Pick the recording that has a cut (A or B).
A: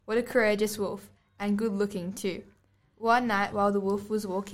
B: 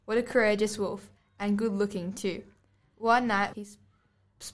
B